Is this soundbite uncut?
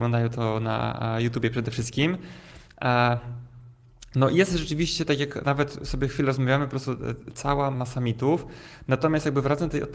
no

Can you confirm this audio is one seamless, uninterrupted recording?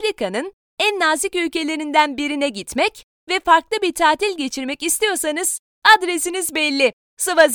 yes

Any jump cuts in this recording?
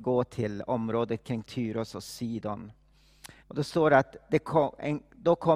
yes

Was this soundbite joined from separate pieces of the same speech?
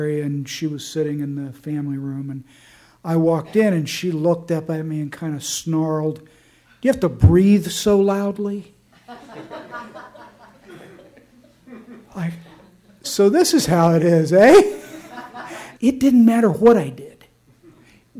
yes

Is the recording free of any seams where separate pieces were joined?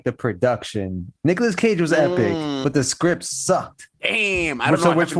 no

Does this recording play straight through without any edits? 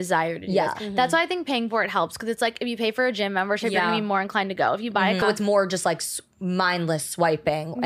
no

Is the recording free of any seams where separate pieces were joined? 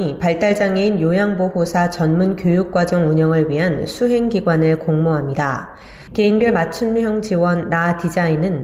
no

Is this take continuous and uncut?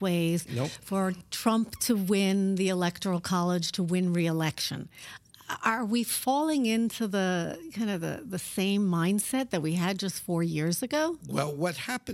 yes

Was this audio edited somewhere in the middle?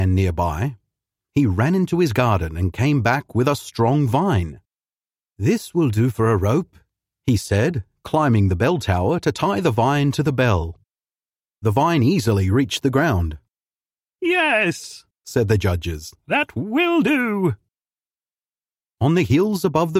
no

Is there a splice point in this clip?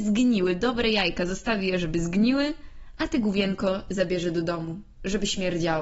no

